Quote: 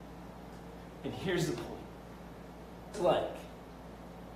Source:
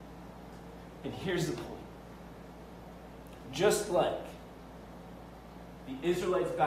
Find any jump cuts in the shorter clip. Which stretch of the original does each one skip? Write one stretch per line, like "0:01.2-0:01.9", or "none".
0:02.9-0:03.8